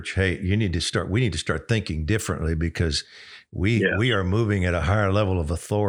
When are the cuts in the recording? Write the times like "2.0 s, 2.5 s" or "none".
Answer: none